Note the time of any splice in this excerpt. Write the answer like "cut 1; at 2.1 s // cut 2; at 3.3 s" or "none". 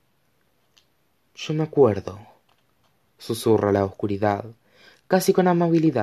none